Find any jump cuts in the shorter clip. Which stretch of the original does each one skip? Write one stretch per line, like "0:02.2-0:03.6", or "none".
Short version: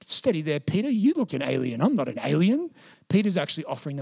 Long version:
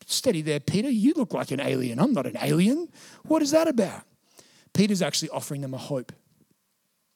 0:01.3-0:01.5
0:03.1-0:04.6